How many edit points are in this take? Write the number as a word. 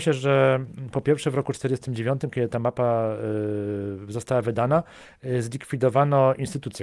zero